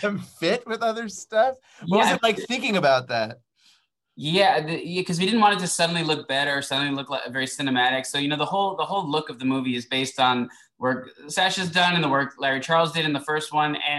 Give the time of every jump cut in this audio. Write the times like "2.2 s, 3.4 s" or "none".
none